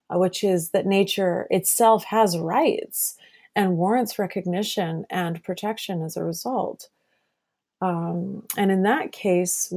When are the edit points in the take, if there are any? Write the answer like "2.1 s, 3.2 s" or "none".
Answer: none